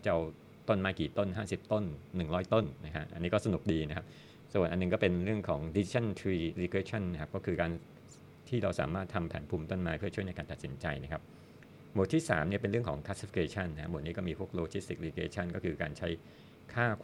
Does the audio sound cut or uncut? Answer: uncut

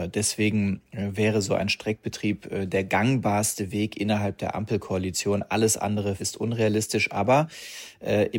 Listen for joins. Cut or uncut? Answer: cut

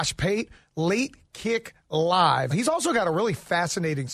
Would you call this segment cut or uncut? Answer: cut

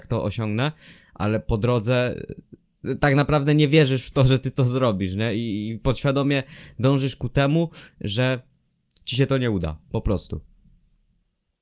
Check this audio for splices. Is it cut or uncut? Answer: uncut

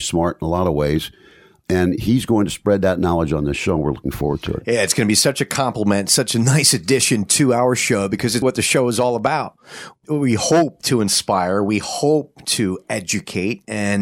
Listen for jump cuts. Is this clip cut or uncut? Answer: cut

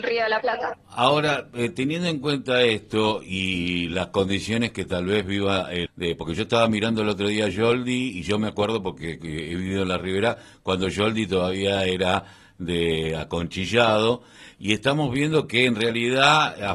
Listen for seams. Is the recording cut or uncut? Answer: cut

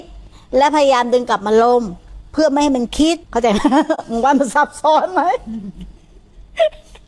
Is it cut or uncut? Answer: cut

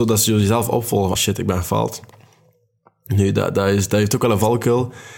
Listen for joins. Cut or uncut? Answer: cut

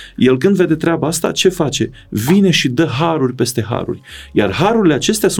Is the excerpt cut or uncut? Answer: uncut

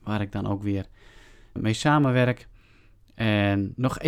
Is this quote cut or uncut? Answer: cut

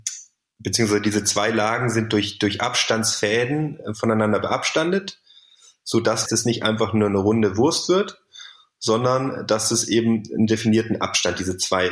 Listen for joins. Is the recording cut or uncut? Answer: cut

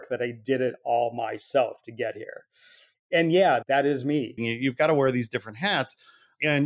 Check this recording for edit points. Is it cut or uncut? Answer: cut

